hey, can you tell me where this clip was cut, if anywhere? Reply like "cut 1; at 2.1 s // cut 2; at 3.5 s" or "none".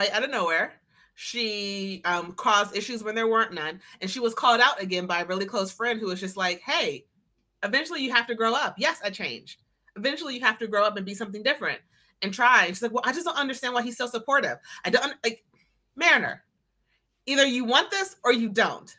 none